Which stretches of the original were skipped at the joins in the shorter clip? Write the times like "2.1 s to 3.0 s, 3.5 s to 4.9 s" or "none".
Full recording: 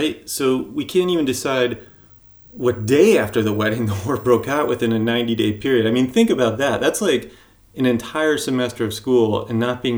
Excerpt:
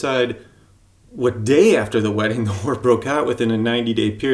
none